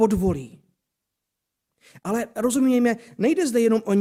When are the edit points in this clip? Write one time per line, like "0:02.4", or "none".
none